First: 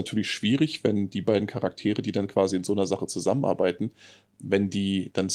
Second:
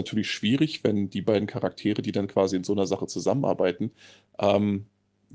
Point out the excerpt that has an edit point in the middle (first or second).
first